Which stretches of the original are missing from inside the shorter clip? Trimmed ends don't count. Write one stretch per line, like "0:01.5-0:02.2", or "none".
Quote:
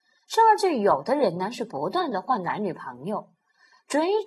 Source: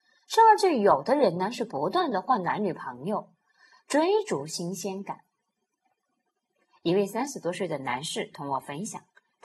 none